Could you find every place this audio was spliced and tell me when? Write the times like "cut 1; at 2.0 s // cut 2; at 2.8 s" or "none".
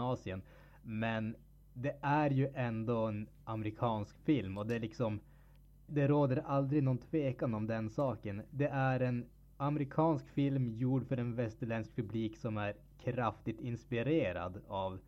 cut 1; at 5.9 s